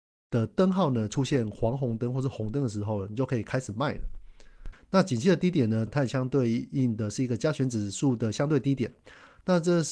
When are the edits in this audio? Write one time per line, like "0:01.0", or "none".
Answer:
0:04.7
0:05.9